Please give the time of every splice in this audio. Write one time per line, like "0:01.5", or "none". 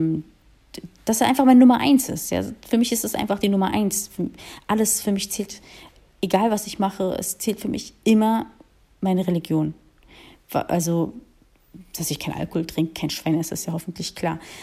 none